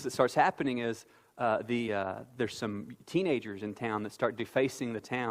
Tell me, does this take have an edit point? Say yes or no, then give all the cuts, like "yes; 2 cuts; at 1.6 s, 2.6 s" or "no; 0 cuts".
no; 0 cuts